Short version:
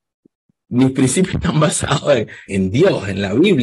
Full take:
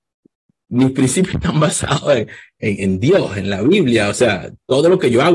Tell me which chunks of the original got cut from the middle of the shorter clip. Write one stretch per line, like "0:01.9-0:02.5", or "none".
0:02.5-0:02.8